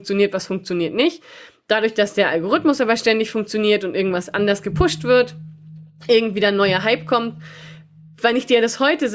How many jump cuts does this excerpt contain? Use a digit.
0